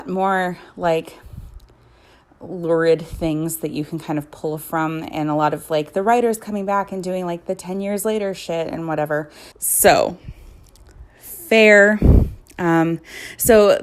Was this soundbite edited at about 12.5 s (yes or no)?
no